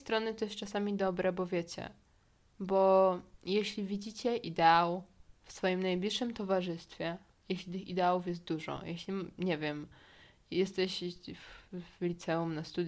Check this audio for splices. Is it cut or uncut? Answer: uncut